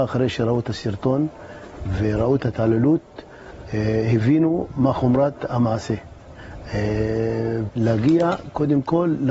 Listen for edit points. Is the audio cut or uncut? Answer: cut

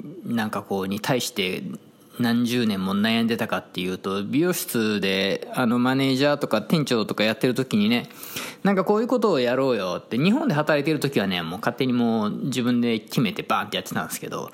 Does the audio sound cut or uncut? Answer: uncut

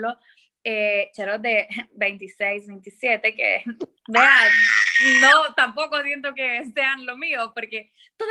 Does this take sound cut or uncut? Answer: uncut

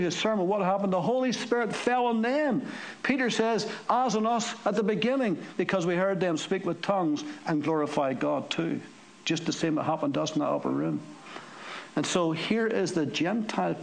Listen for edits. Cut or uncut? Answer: uncut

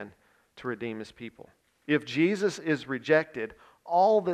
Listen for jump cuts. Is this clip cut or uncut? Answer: uncut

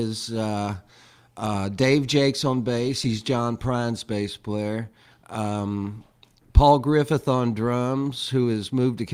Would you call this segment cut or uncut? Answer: uncut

